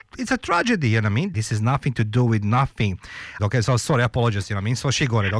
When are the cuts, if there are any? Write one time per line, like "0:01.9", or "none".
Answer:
0:01.3
0:03.4